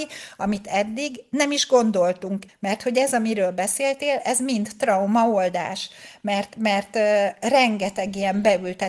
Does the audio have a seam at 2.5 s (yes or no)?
yes